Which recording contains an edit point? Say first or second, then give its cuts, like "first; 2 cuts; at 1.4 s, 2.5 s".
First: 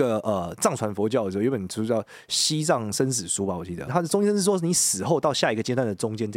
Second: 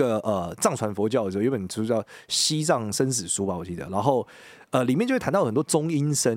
first; 1 cut; at 3.9 s